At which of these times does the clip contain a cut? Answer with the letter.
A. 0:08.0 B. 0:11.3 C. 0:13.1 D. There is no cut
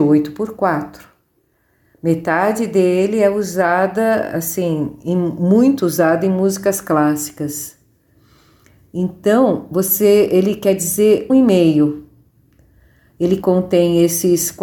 B